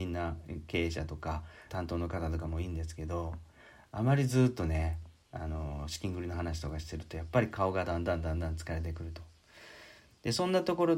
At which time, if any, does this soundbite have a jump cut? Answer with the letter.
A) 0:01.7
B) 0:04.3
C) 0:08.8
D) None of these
A